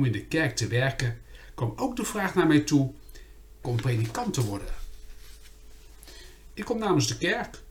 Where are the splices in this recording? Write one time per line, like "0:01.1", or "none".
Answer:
0:03.6
0:06.5